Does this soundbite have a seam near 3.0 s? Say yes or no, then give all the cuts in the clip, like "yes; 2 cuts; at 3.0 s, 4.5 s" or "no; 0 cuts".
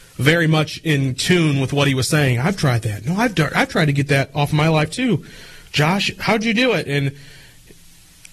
no; 0 cuts